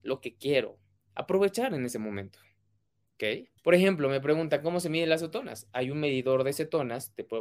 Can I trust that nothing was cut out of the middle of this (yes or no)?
no